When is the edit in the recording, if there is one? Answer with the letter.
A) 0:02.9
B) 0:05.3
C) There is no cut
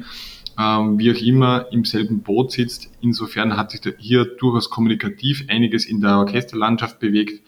C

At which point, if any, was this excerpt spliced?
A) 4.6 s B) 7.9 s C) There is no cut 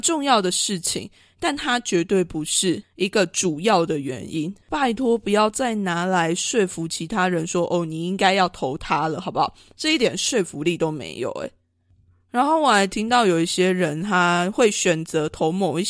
A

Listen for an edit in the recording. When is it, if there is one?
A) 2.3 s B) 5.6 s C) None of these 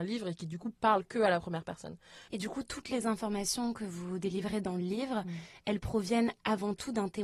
A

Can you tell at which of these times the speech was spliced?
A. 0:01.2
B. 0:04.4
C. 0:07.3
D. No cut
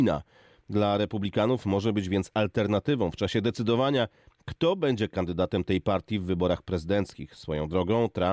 D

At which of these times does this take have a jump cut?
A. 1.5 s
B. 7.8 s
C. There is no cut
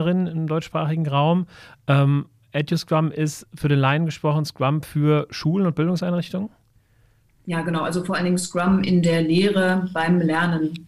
C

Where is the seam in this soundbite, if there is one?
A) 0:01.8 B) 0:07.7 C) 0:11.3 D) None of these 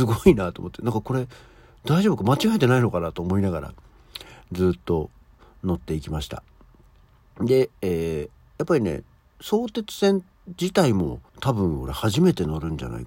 C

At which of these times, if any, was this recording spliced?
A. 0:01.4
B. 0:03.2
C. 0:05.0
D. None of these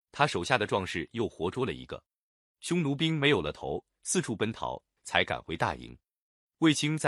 C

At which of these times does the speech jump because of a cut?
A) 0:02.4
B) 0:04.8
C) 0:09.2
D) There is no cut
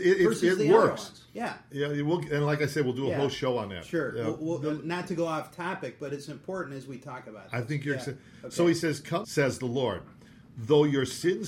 C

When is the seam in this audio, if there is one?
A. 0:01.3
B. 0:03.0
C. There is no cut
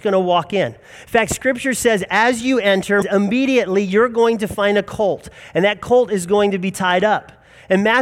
B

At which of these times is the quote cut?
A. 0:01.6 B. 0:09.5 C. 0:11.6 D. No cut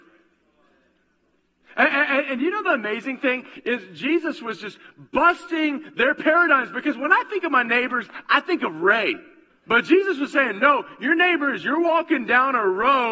B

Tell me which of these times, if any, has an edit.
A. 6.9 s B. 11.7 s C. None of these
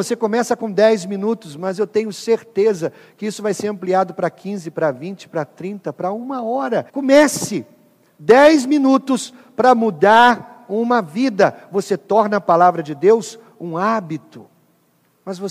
A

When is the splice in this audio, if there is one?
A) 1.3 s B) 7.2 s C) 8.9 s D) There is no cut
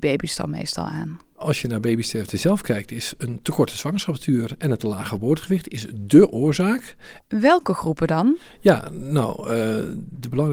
B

